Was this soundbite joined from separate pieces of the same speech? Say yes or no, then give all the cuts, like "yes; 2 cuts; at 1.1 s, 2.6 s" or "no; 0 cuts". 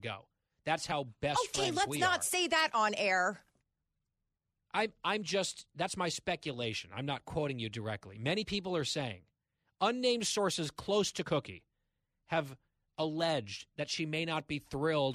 no; 0 cuts